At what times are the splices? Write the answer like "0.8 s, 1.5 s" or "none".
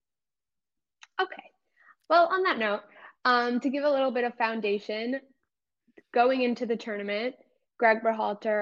none